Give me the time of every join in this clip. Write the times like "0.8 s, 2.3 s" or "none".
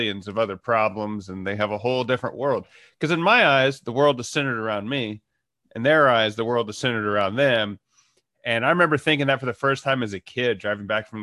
none